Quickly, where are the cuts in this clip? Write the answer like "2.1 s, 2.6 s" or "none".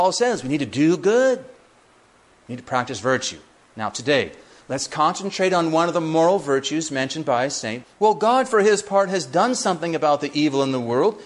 7.8 s

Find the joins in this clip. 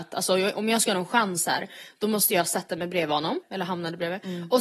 3.4 s

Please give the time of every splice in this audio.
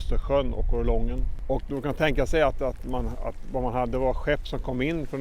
none

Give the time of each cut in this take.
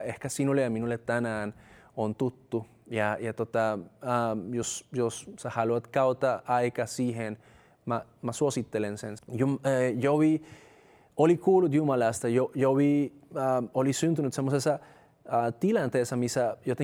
9.2 s

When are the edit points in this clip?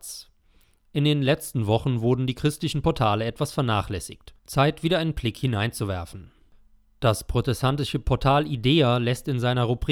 4.4 s

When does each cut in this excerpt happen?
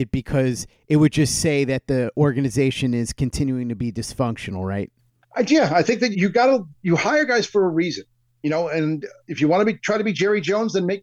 6.1 s

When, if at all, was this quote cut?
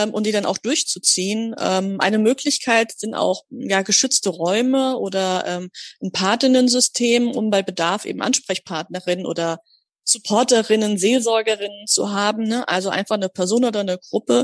none

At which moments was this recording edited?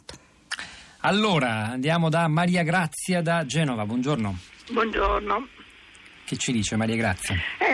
none

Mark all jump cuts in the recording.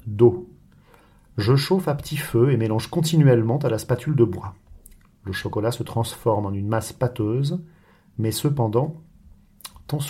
none

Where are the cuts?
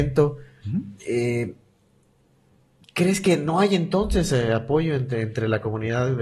1.0 s

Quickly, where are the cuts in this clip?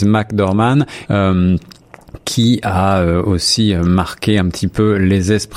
1.1 s

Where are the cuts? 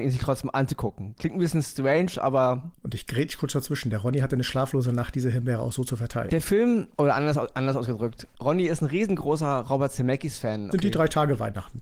6.3 s, 10.7 s

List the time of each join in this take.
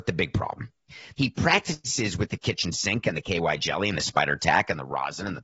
1.1 s

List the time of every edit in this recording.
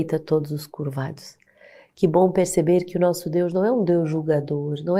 none

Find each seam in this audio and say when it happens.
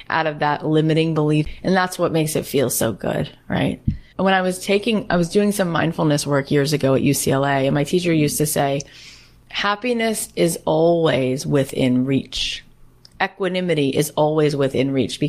4.1 s

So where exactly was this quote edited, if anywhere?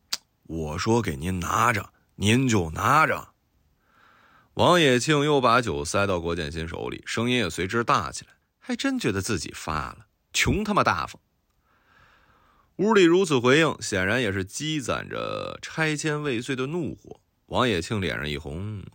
8.4 s

